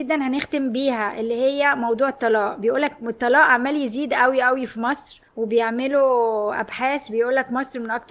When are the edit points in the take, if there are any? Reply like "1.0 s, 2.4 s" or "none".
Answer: 5.3 s